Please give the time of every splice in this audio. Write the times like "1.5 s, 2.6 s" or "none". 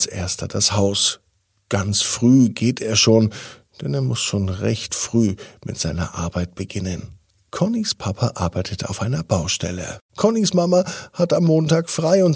10.1 s